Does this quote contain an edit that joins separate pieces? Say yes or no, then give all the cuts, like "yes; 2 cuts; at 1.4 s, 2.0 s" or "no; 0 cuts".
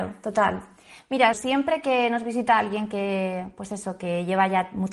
yes; 1 cut; at 1.3 s